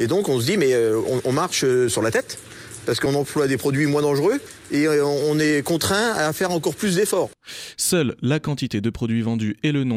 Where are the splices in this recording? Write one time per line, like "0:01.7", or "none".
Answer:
0:07.7